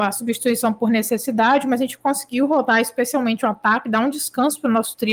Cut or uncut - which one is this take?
uncut